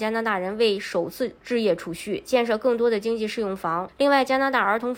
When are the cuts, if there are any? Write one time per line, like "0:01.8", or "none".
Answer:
0:01.4
0:03.9